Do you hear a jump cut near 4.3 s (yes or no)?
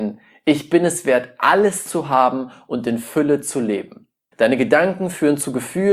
yes